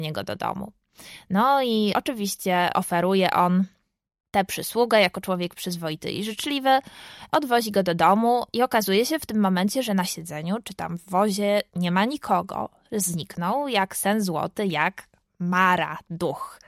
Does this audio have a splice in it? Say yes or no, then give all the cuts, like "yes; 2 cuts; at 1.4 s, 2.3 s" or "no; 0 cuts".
no; 0 cuts